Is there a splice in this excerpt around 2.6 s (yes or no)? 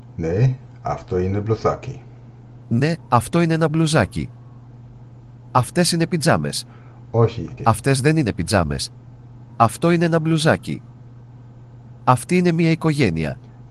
no